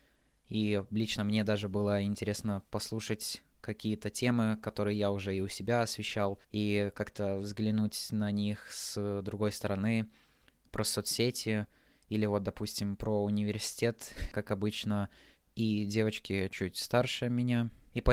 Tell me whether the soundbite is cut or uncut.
cut